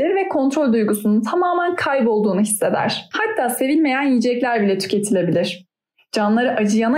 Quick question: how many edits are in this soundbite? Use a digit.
1